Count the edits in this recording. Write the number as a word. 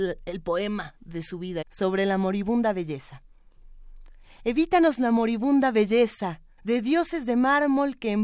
two